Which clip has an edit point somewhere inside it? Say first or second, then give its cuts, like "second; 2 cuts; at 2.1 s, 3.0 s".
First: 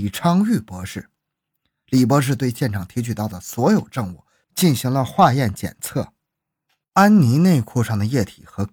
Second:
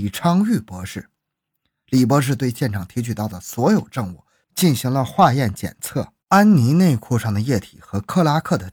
second; 1 cut; at 6.2 s